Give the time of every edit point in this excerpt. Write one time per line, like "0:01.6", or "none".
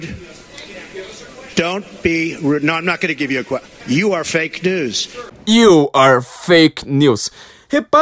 0:03.8